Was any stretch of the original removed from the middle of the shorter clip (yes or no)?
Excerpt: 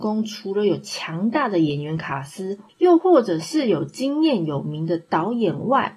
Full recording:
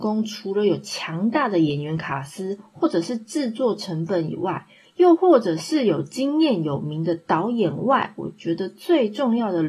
yes